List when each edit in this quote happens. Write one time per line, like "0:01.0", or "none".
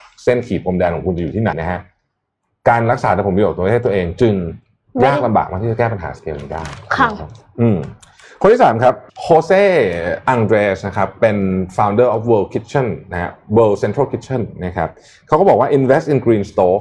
0:01.5
0:09.1